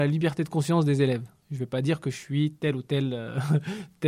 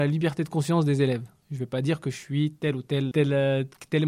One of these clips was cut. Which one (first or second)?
second